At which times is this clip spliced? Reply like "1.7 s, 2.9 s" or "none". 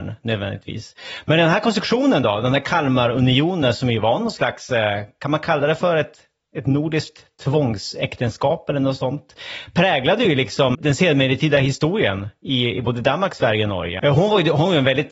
10.7 s, 14.0 s